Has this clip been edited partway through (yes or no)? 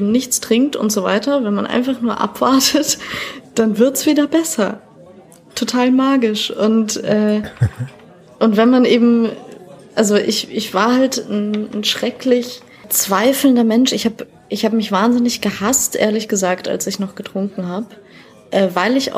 no